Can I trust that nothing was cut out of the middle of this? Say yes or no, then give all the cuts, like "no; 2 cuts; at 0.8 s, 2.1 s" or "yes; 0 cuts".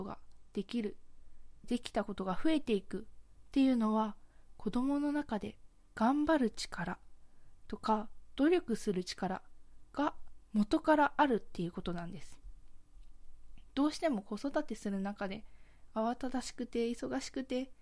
no; 1 cut; at 1.6 s